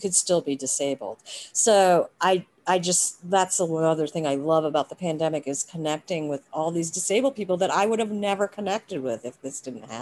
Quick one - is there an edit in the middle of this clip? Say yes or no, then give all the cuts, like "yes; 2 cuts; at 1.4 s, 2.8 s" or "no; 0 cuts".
no; 0 cuts